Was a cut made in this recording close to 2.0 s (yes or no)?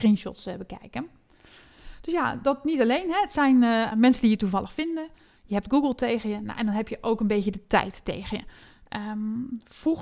no